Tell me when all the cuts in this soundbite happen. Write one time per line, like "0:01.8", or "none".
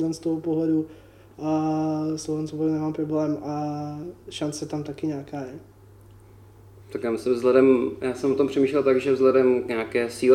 none